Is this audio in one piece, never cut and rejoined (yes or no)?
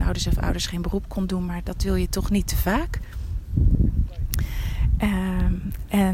yes